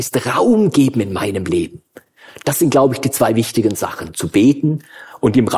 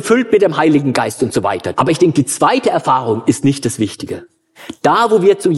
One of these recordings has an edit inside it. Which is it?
second; 1 cut; at 1.7 s

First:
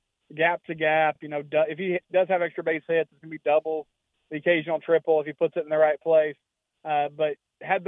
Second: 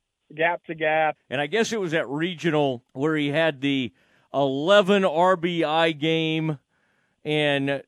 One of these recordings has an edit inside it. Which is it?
second; 2 cuts; at 1.2 s, 2.9 s

